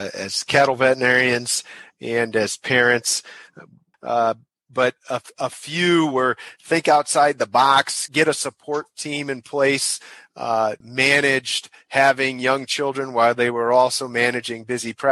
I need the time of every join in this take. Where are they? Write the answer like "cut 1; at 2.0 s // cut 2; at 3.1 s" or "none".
cut 1; at 3.9 s // cut 2; at 8.1 s // cut 3; at 10.8 s

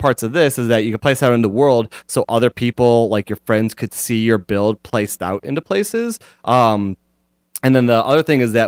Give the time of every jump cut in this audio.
none

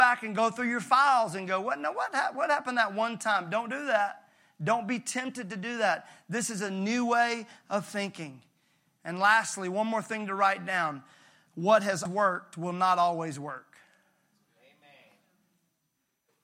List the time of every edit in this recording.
cut 1; at 12.1 s

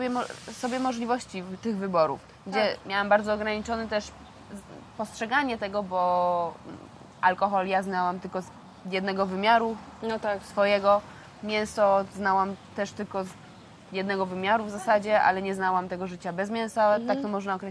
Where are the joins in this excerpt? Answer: cut 1; at 2.8 s

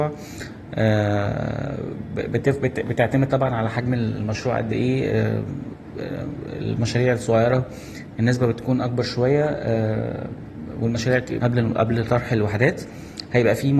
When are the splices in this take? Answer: cut 1; at 11.4 s

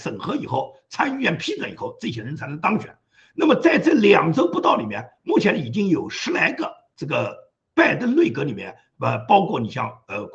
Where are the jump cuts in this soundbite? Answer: none

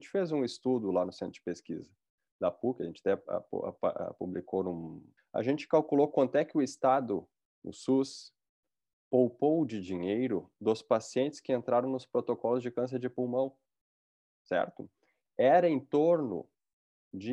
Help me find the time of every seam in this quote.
cut 1; at 5.2 s

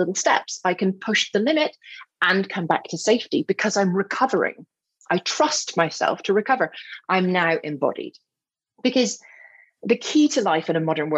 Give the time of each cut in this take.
none

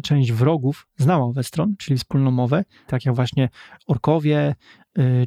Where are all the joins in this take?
cut 1; at 2.9 s

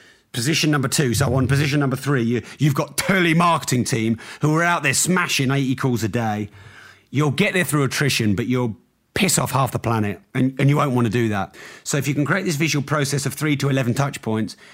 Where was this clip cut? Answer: none

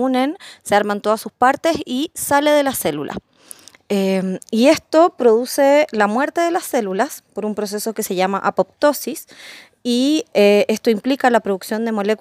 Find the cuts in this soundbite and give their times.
none

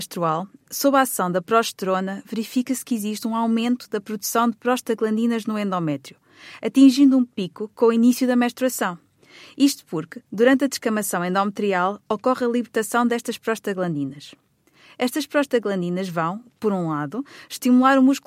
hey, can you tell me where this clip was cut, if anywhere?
none

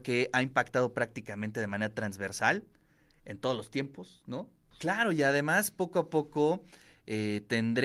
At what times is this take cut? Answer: cut 1; at 4.7 s

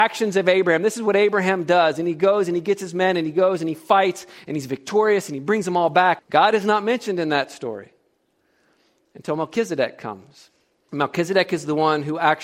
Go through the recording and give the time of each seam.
cut 1; at 6.2 s // cut 2; at 10.9 s

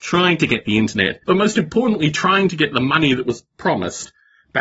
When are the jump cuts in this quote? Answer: cut 1; at 1.2 s

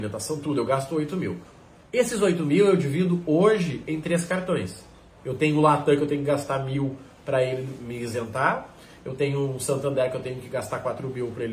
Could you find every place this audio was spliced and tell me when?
none

